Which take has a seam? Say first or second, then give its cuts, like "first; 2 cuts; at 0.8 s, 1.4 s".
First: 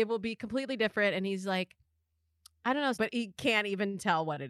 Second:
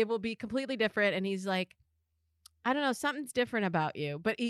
first; 1 cut; at 2.9 s